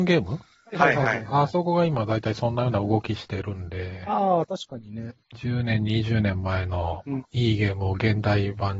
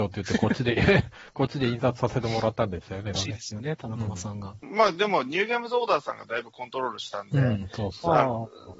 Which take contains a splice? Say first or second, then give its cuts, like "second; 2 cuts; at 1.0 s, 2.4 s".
second; 1 cut; at 3.2 s